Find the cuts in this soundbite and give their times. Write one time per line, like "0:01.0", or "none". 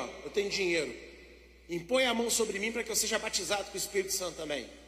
none